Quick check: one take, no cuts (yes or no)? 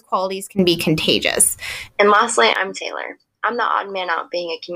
no